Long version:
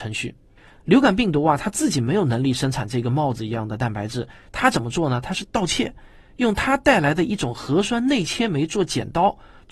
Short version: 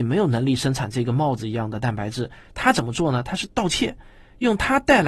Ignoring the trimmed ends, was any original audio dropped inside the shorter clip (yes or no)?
no